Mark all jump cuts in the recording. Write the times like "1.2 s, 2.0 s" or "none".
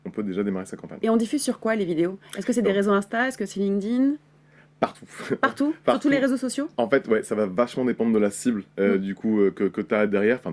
none